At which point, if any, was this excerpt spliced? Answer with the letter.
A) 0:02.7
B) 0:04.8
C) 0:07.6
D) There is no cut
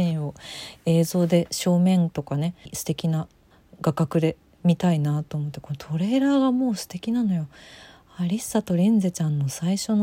A